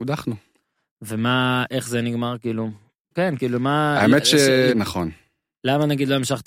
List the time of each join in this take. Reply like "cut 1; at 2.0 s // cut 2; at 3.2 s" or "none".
cut 1; at 3.1 s // cut 2; at 4.7 s